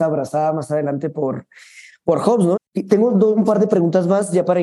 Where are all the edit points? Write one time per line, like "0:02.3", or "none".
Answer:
0:02.6